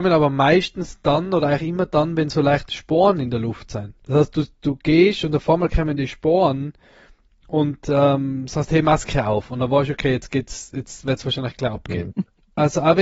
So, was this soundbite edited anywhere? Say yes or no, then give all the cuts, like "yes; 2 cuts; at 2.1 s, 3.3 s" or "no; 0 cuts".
yes; 2 cuts; at 4.0 s, 12.1 s